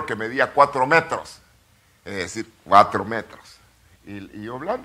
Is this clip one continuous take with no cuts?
no; 1 cut; at 3.9 s

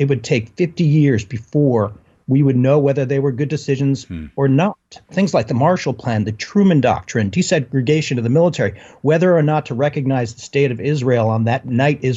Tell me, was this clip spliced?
no; 0 cuts

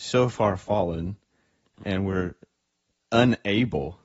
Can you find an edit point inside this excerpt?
yes; 1 cut; at 1.8 s

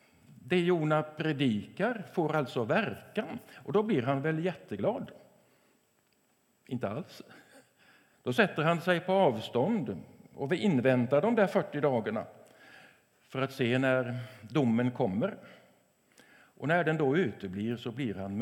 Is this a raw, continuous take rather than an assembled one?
no; 1 cut; at 8.1 s

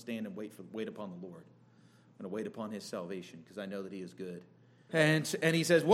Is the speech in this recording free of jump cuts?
no; 1 cut; at 4.9 s

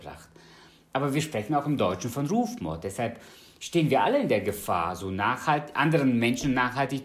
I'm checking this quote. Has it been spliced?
no; 0 cuts

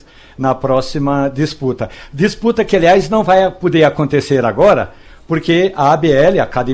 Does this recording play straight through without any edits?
yes; 0 cuts

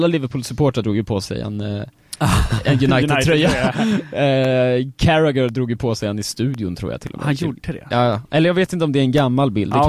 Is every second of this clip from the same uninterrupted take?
yes; 0 cuts

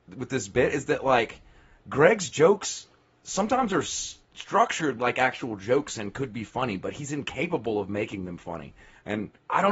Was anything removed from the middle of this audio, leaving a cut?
no; 0 cuts

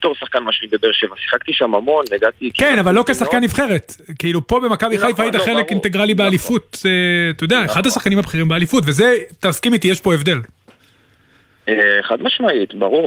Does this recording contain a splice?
no; 0 cuts

